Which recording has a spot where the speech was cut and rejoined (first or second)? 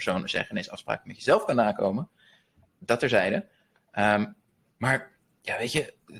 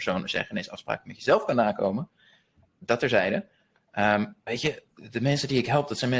second